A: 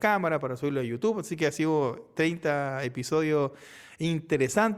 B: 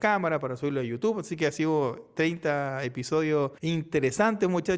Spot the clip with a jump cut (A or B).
B